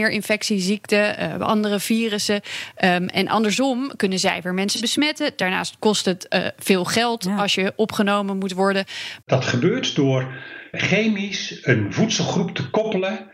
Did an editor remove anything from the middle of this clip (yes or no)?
yes